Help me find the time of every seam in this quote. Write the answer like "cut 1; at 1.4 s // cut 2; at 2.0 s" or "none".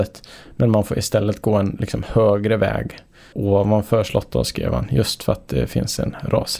cut 1; at 3.3 s